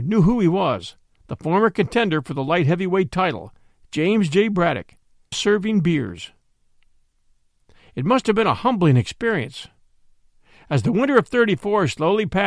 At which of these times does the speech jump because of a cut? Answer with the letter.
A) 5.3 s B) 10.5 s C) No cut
A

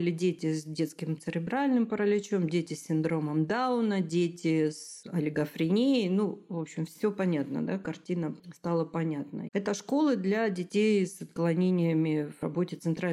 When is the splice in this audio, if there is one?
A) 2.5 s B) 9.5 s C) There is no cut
B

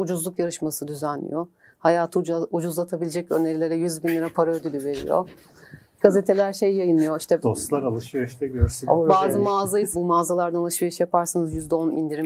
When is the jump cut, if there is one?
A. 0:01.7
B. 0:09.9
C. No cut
B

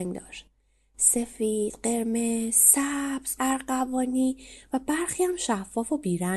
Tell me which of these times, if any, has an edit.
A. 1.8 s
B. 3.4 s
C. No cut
B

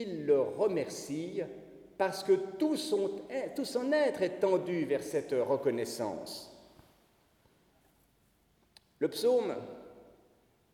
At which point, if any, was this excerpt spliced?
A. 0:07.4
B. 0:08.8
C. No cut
C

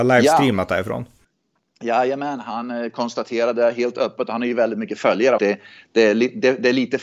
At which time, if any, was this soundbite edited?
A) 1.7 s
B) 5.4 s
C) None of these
B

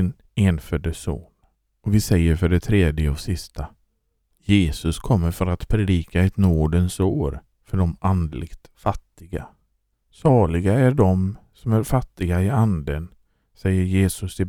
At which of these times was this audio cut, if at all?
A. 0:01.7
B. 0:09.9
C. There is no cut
B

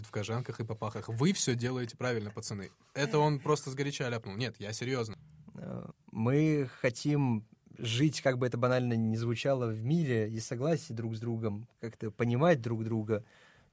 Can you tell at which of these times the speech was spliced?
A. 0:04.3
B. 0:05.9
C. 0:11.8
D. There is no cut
B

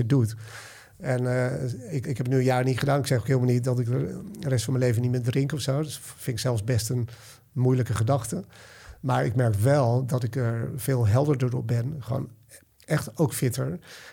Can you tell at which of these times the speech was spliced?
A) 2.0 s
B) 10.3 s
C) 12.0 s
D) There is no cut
A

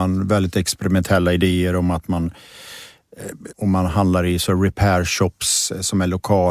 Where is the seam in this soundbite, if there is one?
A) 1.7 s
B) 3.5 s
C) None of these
B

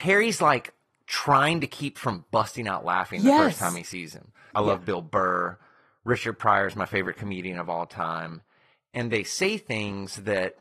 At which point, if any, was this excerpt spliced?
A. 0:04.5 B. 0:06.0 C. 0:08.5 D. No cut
A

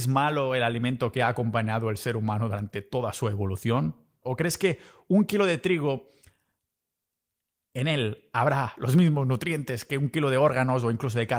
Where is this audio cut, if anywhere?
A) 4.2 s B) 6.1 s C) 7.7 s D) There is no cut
A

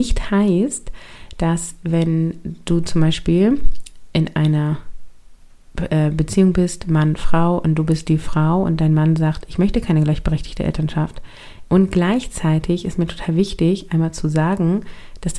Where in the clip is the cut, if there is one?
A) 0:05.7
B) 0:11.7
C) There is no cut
B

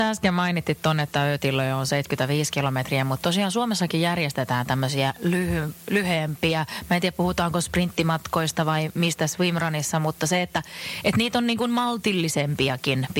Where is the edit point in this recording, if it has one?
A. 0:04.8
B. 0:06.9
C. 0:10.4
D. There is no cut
D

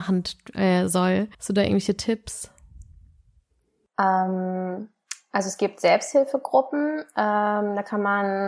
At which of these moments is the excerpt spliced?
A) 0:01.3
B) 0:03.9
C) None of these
A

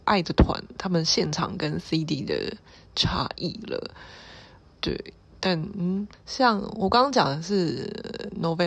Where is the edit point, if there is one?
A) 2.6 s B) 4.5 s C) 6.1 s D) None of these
C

